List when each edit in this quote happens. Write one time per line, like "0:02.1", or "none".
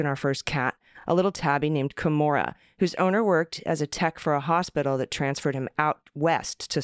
none